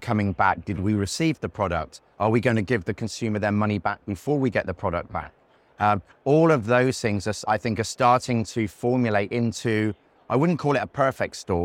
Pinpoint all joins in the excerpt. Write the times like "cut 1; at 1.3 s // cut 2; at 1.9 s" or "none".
none